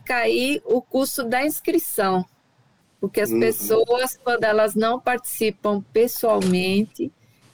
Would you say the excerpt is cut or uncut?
uncut